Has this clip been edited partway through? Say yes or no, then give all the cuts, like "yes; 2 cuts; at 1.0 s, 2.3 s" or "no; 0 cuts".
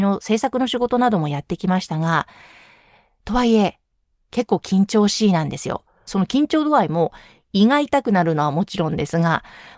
yes; 1 cut; at 6.1 s